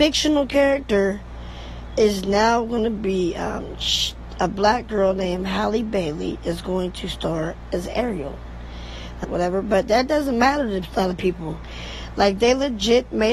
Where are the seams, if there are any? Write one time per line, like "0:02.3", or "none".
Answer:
0:09.2

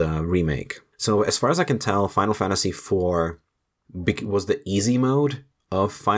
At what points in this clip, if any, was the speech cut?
0:00.9
0:03.8

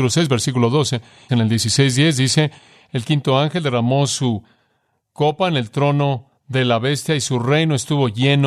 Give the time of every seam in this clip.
0:01.3

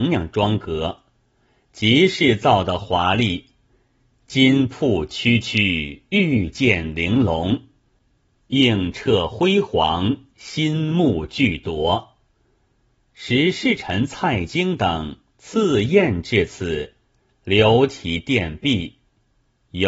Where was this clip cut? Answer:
none

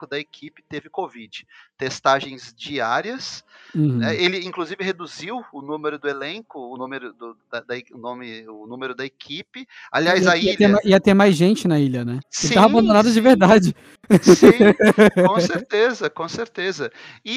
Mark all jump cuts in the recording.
0:12.2

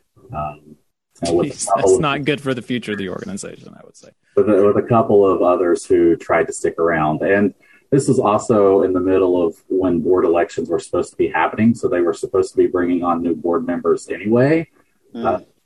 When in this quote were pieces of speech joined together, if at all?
none

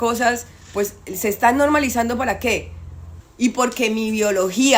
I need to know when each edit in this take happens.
0:03.2

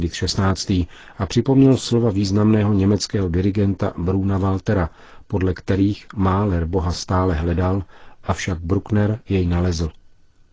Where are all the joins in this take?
none

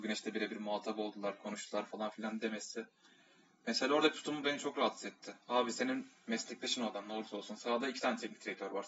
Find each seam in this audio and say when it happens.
none

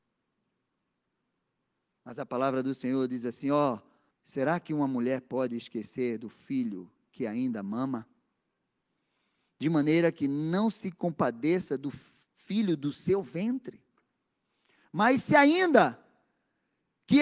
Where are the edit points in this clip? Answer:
0:04.1

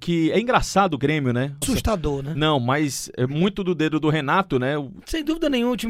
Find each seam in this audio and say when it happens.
0:01.6
0:05.0

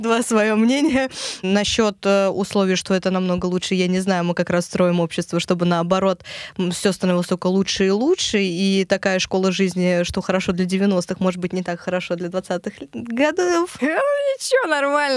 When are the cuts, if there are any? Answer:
0:01.4
0:13.8

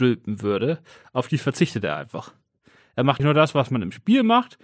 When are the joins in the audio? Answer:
0:03.2

